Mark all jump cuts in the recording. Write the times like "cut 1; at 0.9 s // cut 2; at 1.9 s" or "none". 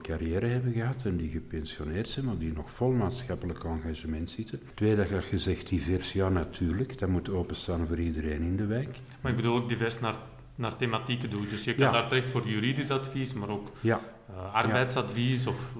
none